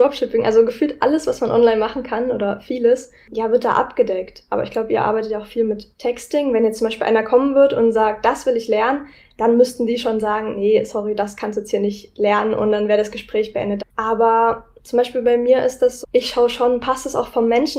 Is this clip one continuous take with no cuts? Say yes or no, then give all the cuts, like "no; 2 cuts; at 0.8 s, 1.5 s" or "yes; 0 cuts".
no; 2 cuts; at 13.8 s, 16.0 s